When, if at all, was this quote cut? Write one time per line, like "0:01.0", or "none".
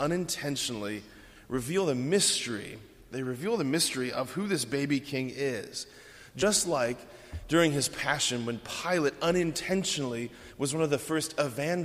none